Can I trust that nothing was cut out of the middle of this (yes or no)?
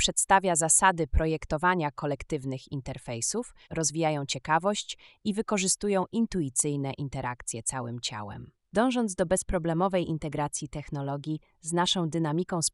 no